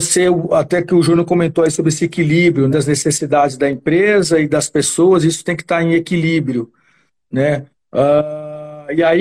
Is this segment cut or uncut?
cut